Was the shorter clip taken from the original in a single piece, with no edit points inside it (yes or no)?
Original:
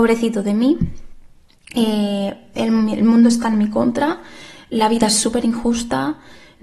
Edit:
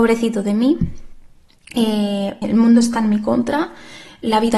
no